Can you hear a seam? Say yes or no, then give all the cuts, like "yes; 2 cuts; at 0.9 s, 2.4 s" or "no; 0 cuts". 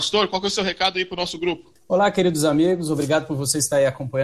no; 0 cuts